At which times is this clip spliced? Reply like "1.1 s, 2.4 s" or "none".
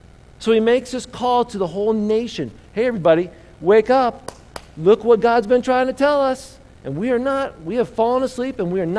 none